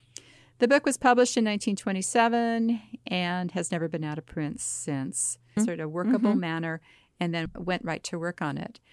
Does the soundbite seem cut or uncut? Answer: cut